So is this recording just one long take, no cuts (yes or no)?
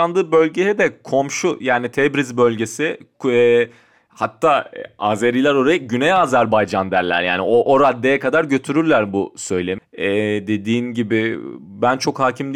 no